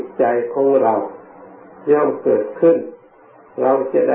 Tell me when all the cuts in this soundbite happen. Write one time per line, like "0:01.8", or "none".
none